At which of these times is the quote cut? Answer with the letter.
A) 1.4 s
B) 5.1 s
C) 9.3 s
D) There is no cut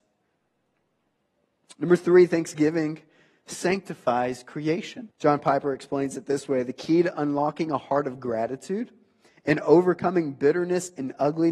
B